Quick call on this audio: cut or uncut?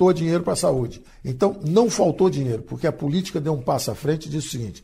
cut